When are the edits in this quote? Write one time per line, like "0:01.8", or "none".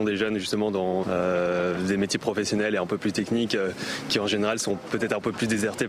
0:01.0